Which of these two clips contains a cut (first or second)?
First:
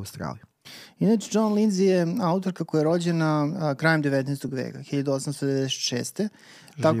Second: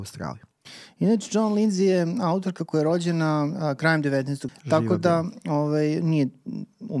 second